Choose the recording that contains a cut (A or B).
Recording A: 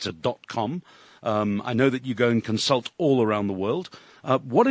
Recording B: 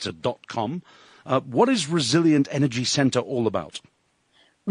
B